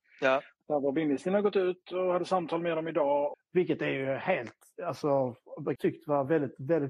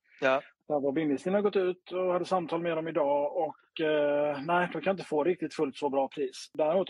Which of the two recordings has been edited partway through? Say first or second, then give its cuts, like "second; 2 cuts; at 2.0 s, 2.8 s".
first; 2 cuts; at 3.3 s, 5.8 s